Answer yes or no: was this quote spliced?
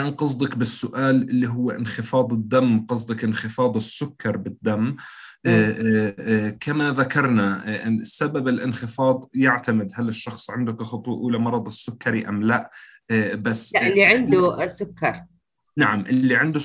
no